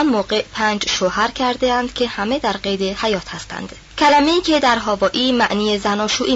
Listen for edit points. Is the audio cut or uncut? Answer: cut